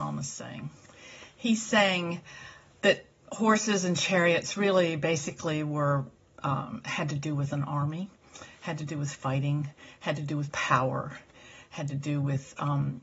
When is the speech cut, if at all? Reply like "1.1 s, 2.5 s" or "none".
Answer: none

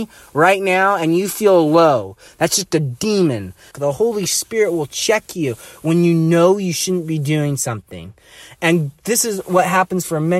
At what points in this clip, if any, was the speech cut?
2.3 s, 3.7 s

